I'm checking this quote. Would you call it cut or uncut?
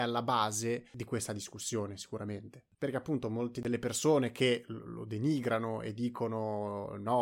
cut